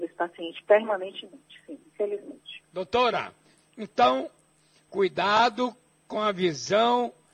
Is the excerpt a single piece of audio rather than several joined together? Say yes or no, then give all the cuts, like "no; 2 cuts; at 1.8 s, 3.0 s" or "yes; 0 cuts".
no; 1 cut; at 2.7 s